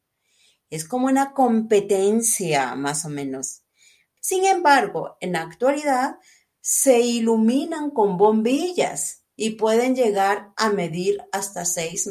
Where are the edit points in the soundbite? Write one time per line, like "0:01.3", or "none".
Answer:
0:04.2